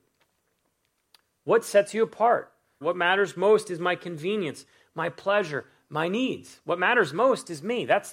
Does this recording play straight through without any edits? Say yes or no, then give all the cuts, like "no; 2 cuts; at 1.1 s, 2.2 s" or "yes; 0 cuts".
no; 1 cut; at 2.8 s